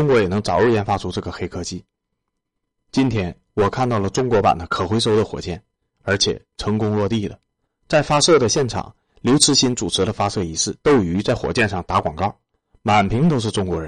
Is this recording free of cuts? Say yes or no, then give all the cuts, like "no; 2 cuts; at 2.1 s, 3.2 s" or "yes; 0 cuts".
no; 2 cuts; at 7.7 s, 10.8 s